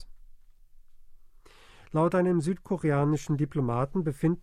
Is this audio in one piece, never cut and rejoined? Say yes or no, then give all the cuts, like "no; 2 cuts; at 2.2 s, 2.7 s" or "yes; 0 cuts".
yes; 0 cuts